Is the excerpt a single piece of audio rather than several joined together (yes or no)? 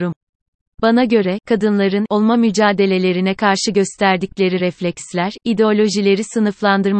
no